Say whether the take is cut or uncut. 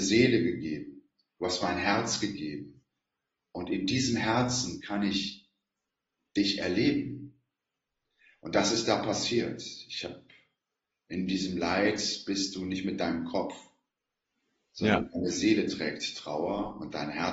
uncut